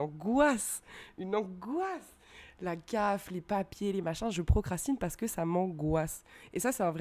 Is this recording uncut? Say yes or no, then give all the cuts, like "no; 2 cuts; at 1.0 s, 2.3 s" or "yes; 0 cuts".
yes; 0 cuts